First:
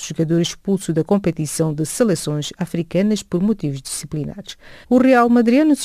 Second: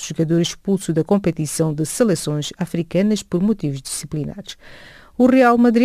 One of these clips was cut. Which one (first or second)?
first